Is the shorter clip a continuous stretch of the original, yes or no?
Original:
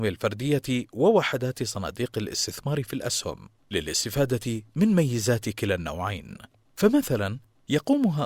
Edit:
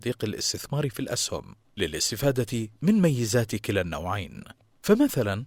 yes